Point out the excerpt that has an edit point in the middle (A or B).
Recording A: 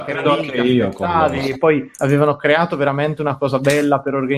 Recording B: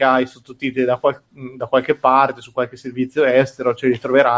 A